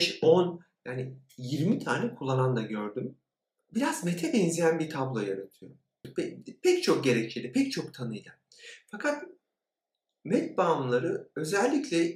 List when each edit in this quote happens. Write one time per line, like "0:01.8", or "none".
0:06.0